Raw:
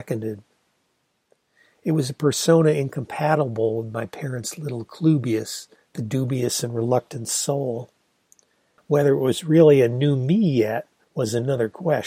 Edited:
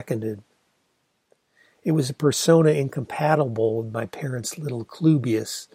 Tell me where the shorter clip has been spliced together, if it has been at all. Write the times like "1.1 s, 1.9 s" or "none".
none